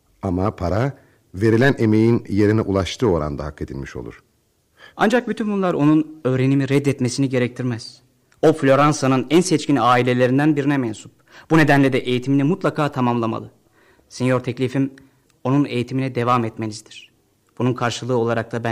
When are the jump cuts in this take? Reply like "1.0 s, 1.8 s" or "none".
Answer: 4.9 s